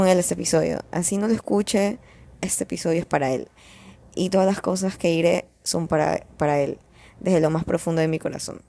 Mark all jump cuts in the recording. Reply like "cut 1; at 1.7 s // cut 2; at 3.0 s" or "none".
none